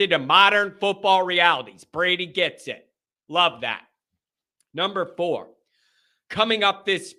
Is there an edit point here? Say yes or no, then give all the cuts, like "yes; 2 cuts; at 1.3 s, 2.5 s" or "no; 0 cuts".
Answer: no; 0 cuts